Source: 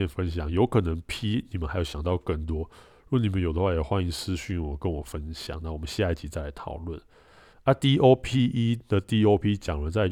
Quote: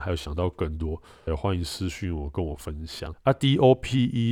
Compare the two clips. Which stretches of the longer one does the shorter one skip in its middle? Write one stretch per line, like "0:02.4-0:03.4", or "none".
0:03.0-0:03.7
0:05.6-0:07.5